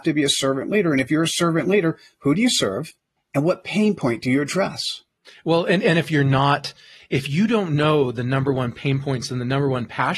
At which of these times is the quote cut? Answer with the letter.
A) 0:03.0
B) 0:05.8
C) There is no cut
C